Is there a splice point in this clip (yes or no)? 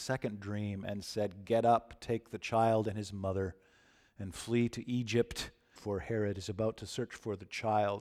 yes